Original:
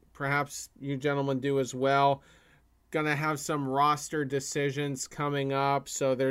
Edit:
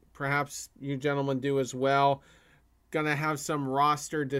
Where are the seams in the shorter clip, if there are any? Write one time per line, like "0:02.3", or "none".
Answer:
none